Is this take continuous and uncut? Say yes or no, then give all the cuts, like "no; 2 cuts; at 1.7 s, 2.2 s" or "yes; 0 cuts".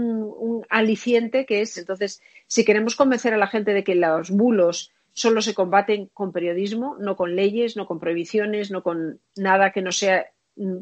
no; 1 cut; at 1.8 s